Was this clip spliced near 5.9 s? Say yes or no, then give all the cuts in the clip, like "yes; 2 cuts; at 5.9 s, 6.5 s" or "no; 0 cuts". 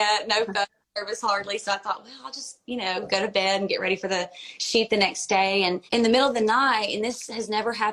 yes; 1 cut; at 5.9 s